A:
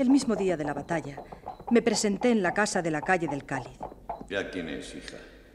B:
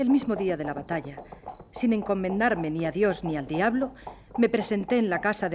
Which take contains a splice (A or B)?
A